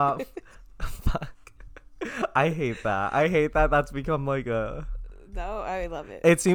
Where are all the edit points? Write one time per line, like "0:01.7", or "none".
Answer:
none